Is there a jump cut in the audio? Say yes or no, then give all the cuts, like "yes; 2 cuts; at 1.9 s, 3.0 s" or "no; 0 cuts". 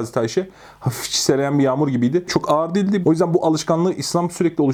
yes; 1 cut; at 3.0 s